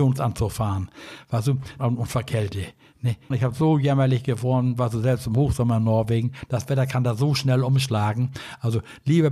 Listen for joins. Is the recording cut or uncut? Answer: cut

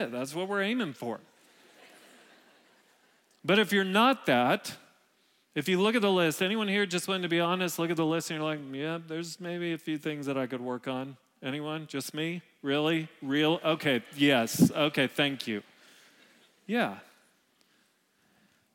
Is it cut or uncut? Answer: uncut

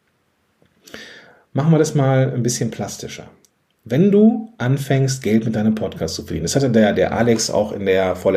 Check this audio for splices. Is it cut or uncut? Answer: uncut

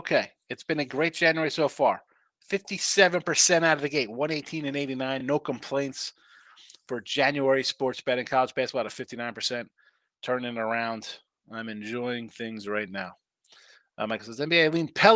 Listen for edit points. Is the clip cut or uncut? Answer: uncut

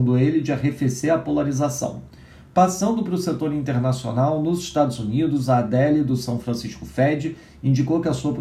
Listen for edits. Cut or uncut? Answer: uncut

